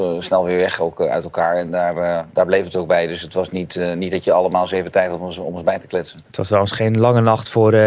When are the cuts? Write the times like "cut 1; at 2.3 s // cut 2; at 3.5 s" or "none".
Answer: none